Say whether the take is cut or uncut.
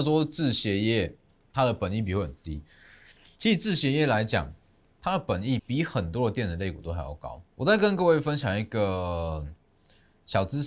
cut